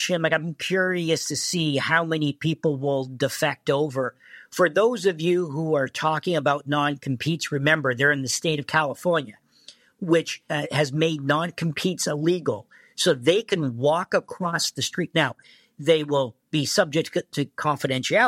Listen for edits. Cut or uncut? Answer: uncut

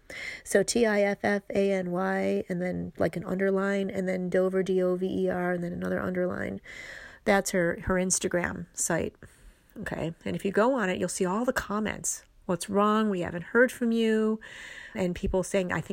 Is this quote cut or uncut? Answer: cut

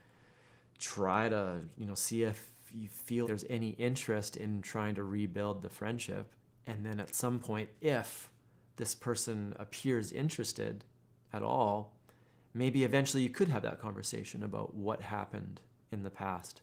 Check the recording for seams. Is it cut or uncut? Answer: cut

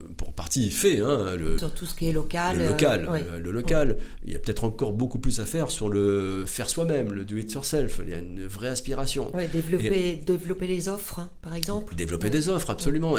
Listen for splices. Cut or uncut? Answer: cut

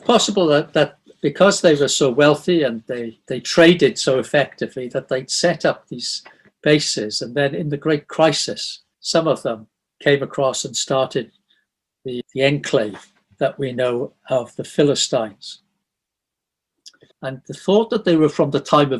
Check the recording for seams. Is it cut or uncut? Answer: cut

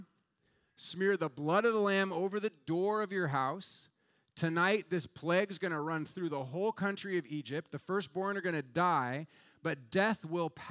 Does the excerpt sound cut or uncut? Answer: uncut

